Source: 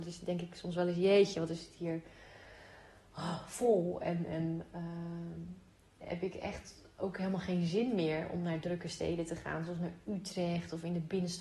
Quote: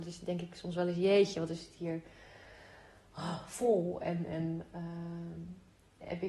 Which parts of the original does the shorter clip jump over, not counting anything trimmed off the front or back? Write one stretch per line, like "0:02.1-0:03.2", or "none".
none